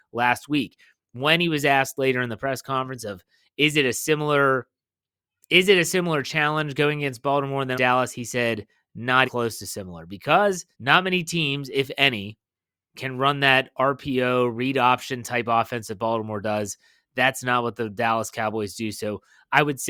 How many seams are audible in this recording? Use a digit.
3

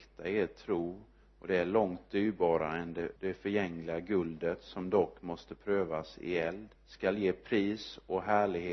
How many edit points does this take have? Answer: 2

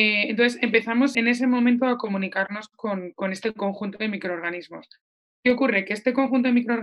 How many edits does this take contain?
1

